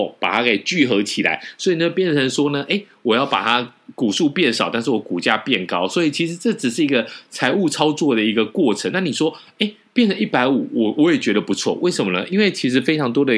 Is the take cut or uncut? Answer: uncut